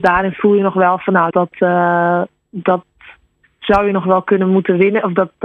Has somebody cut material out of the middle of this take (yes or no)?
yes